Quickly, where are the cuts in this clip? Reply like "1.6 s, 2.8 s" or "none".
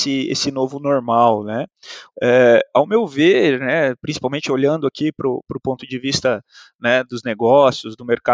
2.1 s